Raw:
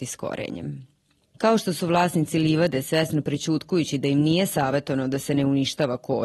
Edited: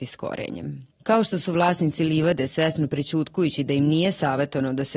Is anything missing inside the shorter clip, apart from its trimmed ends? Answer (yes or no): yes